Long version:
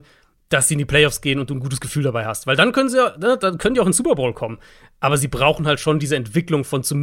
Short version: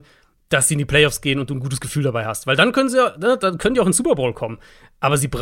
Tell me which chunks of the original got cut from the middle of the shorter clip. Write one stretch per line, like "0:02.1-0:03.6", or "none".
none